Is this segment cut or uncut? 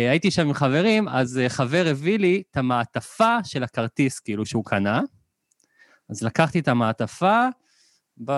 uncut